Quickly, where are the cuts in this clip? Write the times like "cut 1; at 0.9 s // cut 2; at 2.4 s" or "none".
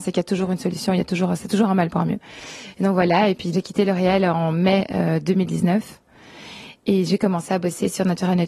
cut 1; at 3.5 s